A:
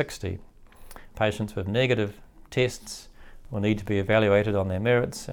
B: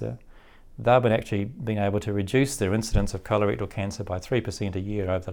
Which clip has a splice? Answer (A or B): A